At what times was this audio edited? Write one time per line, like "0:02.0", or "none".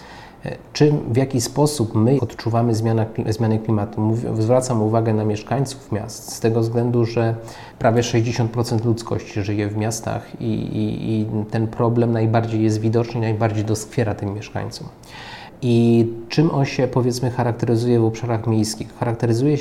0:02.2